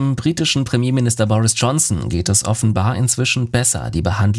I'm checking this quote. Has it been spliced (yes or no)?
no